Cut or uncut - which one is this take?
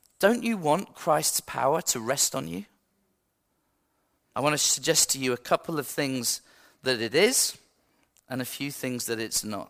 cut